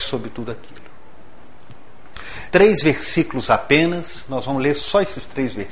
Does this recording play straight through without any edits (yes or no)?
no